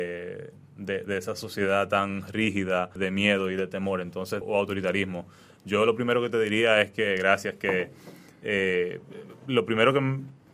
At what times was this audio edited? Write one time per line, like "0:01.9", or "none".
0:03.0
0:04.4